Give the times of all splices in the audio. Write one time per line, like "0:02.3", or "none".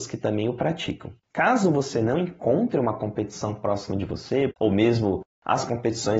0:01.2
0:04.5

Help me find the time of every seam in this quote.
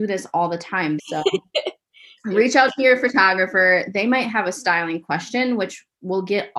0:01.0

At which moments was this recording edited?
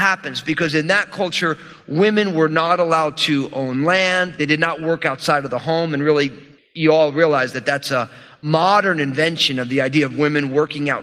none

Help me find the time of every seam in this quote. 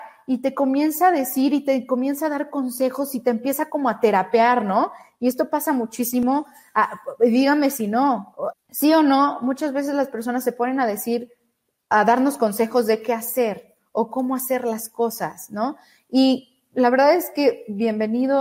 0:08.5
0:11.9

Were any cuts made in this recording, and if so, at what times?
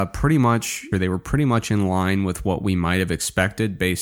0:00.9

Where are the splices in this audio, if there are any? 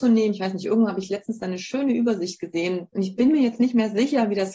0:02.9

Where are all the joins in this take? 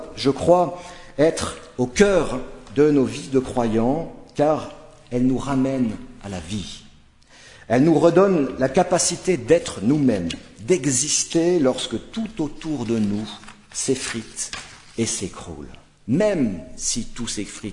none

